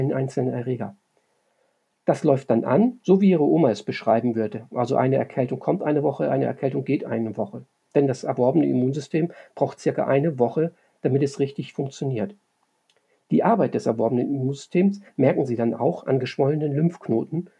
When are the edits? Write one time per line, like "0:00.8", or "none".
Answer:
none